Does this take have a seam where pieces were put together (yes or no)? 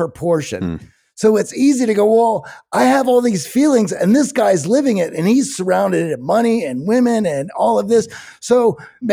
no